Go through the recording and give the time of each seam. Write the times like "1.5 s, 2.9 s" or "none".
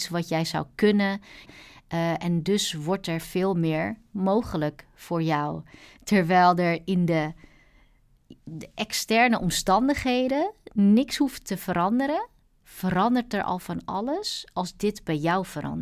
1.5 s